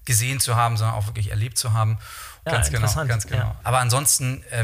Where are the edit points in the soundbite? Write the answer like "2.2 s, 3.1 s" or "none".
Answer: 2.5 s, 3.6 s